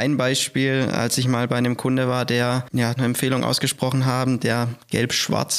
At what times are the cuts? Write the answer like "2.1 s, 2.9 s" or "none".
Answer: 3.0 s